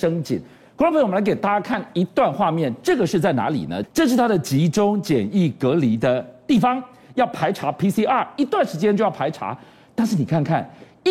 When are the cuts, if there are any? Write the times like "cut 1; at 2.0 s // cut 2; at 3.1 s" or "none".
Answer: cut 1; at 3.8 s